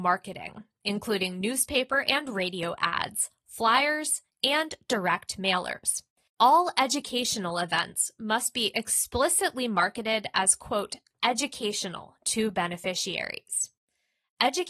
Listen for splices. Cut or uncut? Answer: cut